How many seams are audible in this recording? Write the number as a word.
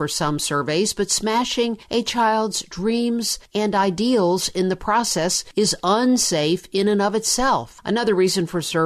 zero